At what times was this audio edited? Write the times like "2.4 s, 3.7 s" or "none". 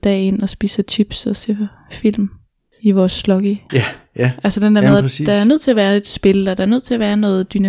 3.7 s